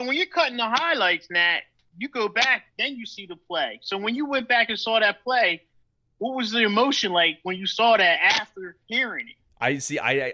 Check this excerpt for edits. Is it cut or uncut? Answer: uncut